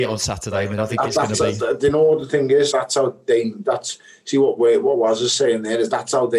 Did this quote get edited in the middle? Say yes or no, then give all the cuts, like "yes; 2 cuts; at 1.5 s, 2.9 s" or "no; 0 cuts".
yes; 1 cut; at 2.7 s